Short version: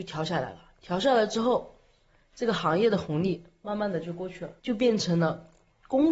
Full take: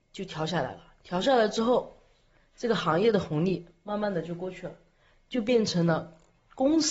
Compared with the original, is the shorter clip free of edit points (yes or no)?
no